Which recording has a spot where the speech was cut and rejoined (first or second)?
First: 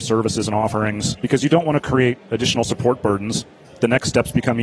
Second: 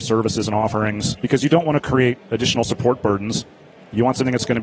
first